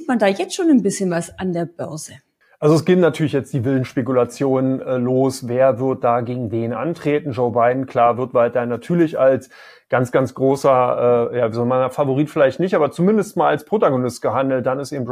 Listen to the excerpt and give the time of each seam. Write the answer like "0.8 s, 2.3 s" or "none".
none